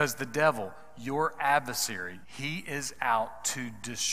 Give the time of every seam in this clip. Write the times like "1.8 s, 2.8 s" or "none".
2.2 s